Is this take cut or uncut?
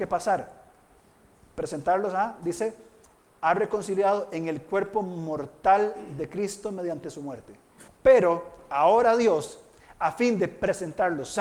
cut